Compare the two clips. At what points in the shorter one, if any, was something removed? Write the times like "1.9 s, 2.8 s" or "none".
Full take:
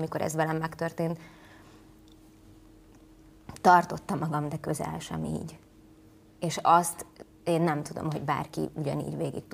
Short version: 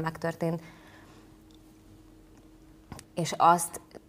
3.0 s